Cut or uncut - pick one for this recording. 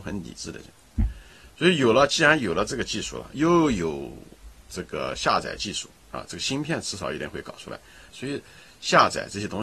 cut